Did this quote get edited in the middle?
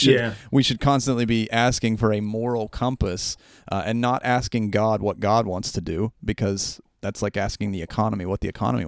no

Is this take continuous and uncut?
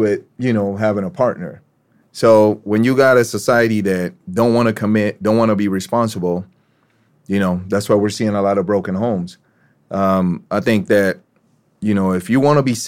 yes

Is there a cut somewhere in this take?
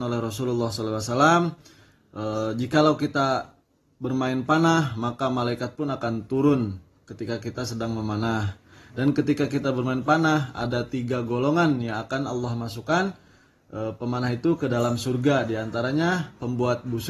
no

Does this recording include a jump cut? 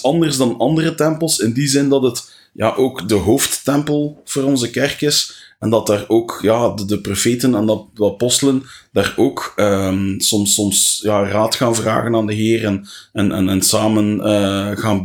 no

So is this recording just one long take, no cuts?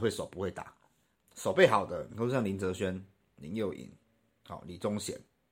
no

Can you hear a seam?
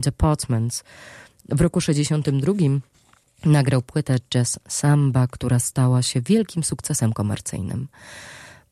no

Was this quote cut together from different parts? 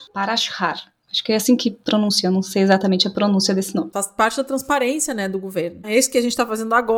yes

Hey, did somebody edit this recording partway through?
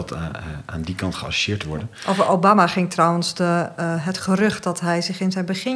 no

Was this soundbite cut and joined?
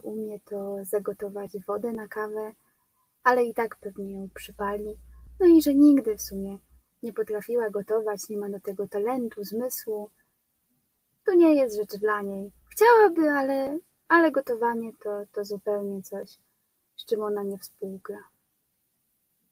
no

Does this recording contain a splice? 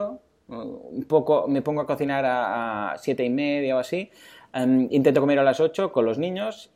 no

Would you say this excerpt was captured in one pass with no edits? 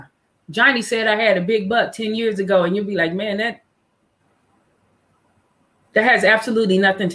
yes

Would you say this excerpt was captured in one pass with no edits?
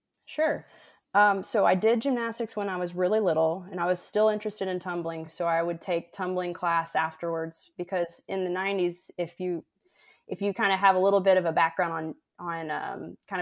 yes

